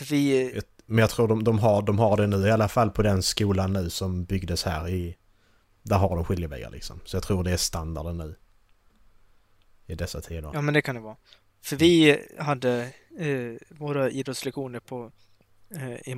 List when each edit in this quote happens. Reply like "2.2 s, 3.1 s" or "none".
none